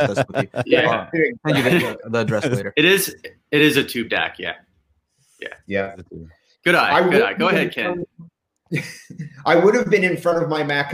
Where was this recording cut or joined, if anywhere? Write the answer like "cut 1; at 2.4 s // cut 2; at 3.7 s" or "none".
none